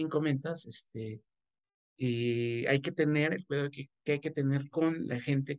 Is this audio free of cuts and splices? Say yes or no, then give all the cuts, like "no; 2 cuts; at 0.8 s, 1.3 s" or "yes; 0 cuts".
yes; 0 cuts